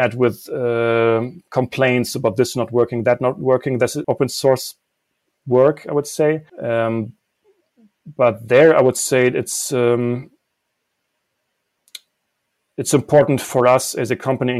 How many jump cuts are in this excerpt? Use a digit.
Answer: 2